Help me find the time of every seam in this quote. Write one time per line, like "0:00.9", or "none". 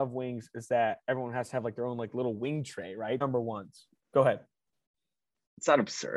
0:01.0
0:03.2